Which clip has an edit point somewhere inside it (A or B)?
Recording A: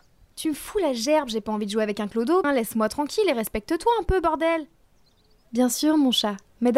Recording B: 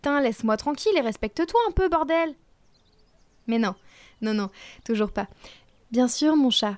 A